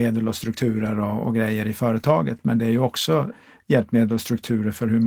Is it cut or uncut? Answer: uncut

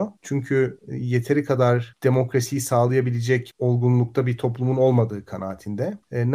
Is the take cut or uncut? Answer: uncut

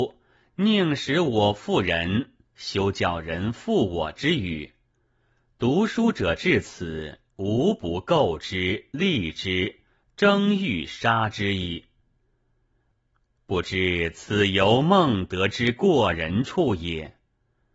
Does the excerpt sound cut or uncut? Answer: uncut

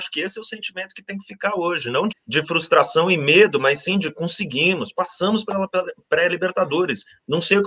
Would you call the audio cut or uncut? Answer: cut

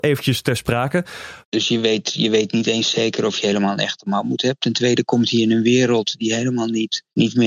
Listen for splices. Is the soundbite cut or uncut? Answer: cut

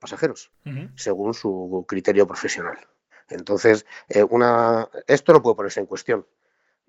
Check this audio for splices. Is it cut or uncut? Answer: cut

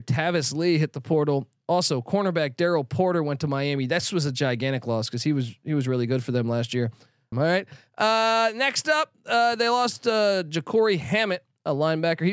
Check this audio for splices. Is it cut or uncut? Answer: cut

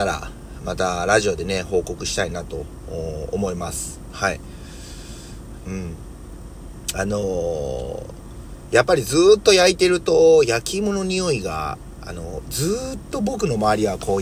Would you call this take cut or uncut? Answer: cut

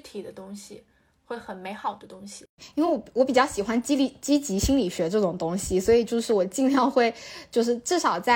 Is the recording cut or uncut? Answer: uncut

